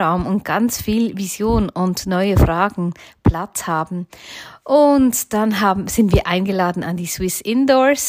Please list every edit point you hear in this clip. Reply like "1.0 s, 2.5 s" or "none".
none

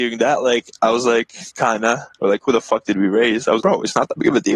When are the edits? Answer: 1.5 s, 3.6 s

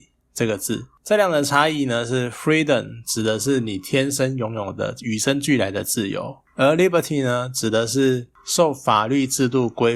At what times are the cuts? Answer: none

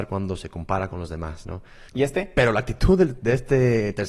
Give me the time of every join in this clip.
1.9 s

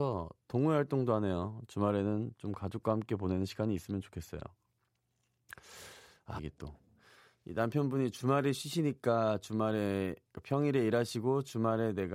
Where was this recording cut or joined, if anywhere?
6.4 s

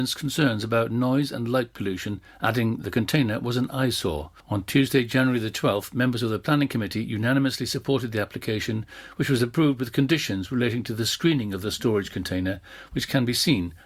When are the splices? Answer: none

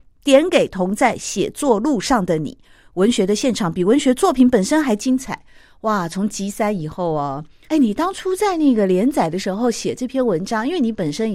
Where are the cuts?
7.7 s

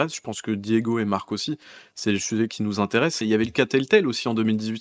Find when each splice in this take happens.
3.2 s

